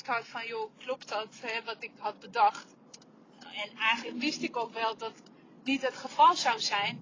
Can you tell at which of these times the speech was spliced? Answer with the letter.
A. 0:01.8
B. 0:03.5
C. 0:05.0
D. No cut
C